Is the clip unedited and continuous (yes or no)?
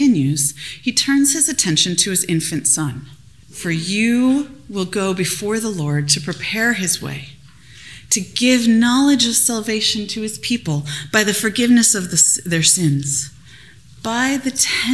no